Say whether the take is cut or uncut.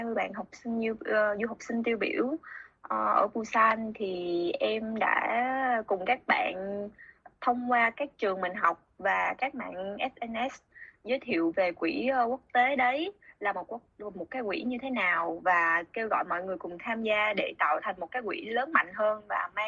uncut